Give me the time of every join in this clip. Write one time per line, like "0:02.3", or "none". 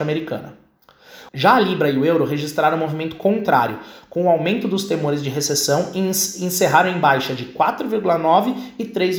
0:01.3